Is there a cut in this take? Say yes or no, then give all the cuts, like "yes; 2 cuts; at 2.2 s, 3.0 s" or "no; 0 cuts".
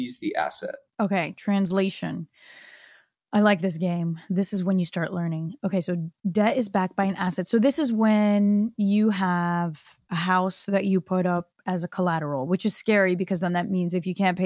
no; 0 cuts